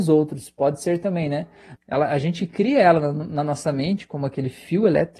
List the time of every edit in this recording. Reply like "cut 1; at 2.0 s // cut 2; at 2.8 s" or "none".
cut 1; at 1.8 s